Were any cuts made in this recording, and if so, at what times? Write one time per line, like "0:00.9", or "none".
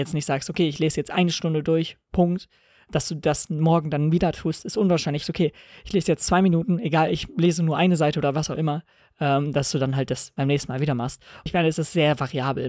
0:05.2
0:11.5